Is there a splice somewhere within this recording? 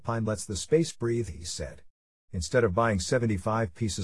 no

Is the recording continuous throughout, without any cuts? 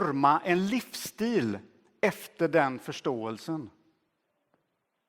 yes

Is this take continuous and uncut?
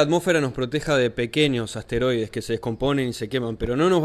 yes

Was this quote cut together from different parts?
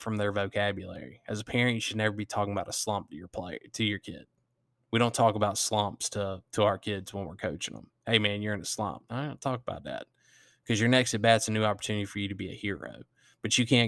no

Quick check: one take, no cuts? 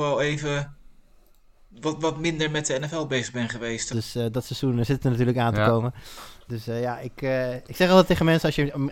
no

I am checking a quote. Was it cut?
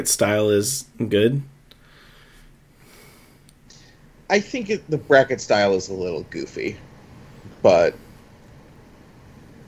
no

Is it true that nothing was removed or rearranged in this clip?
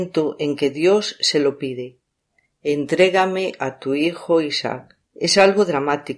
no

